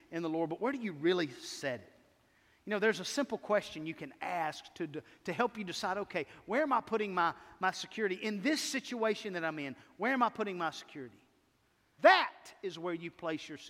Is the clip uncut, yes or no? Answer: no